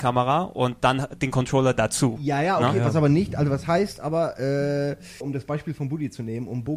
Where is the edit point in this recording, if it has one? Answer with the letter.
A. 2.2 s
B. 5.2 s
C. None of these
B